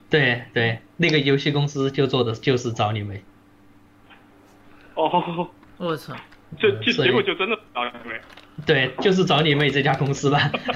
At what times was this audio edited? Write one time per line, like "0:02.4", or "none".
none